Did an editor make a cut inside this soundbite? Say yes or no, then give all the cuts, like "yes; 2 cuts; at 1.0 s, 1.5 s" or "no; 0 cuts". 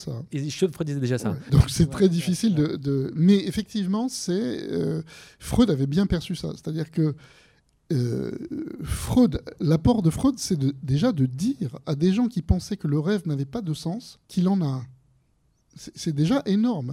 yes; 2 cuts; at 1.5 s, 14.2 s